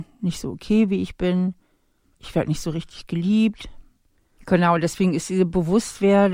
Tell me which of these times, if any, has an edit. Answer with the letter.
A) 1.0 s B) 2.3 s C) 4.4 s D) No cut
C